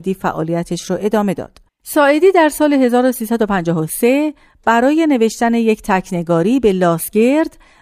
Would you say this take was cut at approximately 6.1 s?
no; 1 cut; at 1.7 s

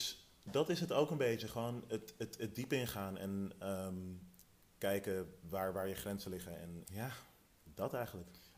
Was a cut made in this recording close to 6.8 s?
yes; 1 cut; at 6.8 s

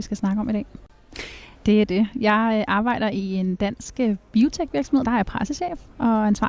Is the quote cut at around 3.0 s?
no; 2 cuts; at 1.6 s, 5.0 s

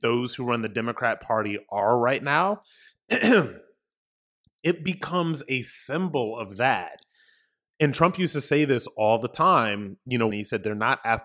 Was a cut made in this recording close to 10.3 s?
yes; 1 cut; at 10.3 s

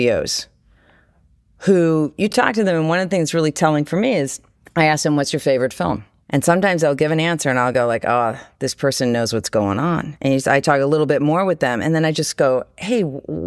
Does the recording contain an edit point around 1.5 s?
no; 0 cuts

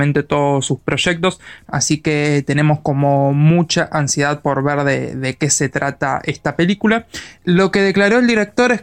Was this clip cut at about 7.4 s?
yes; 2 cuts; at 1.6 s, 7.4 s

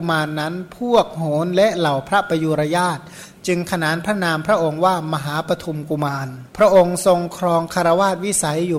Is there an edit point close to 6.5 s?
yes; 1 cut; at 6.5 s

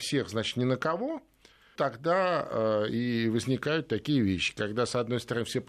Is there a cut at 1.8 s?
yes; 1 cut; at 1.8 s

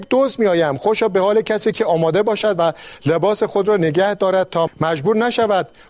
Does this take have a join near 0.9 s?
no; 1 cut; at 4.7 s

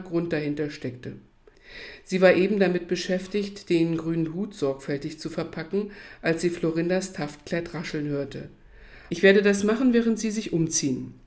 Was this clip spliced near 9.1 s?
yes; 1 cut; at 9.1 s

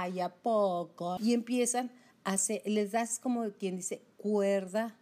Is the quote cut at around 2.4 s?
no; 1 cut; at 1.2 s

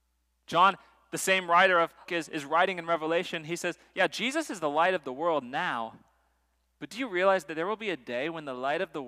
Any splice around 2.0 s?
yes; 1 cut; at 2.0 s

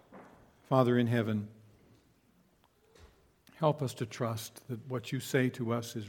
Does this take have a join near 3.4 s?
yes; 1 cut; at 3.4 s

